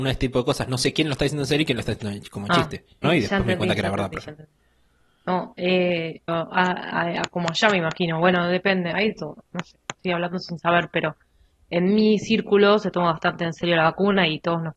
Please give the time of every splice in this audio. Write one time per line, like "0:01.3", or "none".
0:03.0
0:06.3